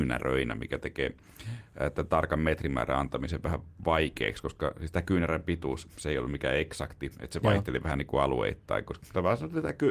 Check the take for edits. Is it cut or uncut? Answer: uncut